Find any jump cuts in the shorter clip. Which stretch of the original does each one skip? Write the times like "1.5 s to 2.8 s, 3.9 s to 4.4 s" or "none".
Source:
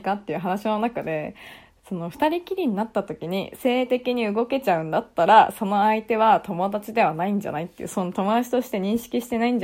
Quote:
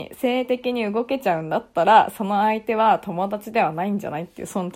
none